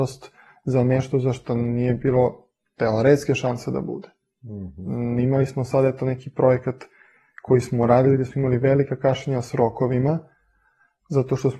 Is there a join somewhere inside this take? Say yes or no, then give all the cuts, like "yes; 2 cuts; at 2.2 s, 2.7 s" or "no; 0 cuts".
no; 0 cuts